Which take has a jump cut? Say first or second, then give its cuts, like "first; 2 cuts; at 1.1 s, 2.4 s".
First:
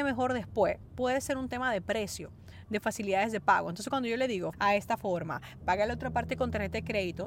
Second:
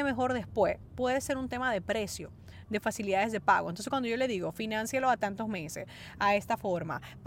first; 2 cuts; at 4.5 s, 5.6 s